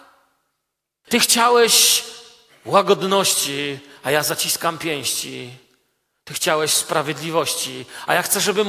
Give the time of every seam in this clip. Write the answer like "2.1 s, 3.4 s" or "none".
1.1 s